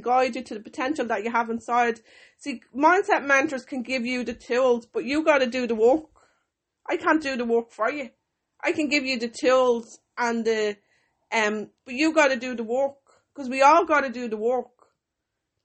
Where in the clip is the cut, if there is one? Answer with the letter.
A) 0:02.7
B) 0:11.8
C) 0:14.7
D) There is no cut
B